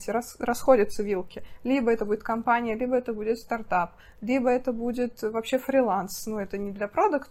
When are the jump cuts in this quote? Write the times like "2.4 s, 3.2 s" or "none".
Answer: none